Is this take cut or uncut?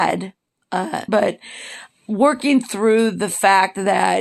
cut